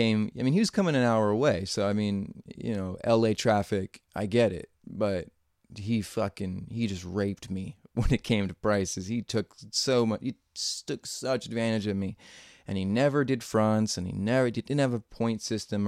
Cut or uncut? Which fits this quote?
uncut